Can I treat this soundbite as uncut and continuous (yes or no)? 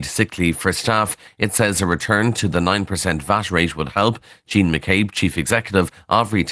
yes